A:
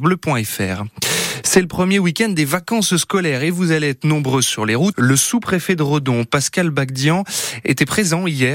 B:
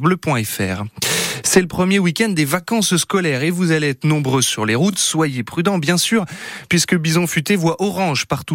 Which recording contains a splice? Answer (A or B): A